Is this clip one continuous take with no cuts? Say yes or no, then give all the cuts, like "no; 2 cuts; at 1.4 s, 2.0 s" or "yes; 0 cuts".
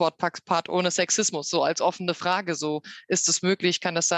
yes; 0 cuts